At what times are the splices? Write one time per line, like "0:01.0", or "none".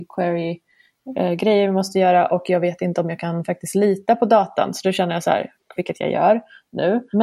0:05.8